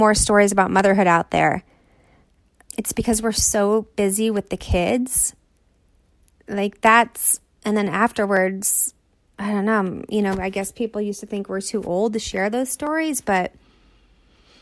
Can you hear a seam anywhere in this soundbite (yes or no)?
yes